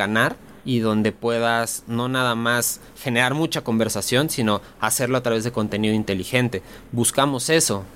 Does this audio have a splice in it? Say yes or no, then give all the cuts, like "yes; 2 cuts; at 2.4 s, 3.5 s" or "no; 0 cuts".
no; 0 cuts